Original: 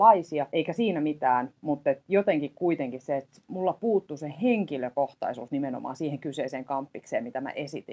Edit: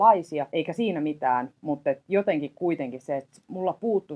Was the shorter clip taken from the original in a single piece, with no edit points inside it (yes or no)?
yes